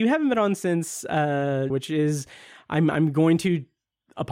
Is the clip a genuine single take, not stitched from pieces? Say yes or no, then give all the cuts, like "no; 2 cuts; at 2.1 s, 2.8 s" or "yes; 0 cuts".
no; 1 cut; at 1.7 s